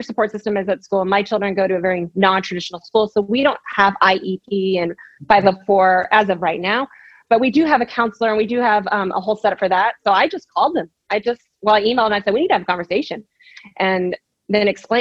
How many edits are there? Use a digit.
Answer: 0